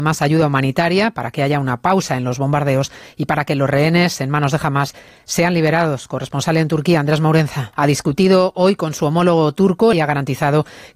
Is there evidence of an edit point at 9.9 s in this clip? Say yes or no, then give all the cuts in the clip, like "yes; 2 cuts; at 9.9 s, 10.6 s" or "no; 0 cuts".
yes; 2 cuts; at 7.7 s, 9.9 s